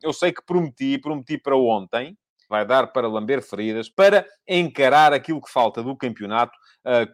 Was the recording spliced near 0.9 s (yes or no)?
no